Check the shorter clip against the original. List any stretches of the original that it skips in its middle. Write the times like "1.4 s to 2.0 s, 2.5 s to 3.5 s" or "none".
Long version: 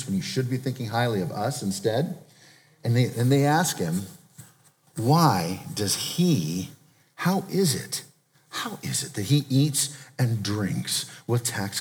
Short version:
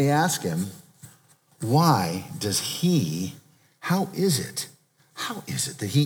none